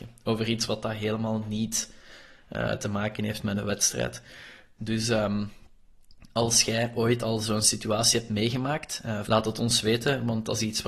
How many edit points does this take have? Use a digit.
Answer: 2